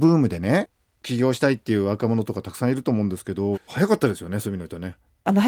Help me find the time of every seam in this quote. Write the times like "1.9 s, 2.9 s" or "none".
3.5 s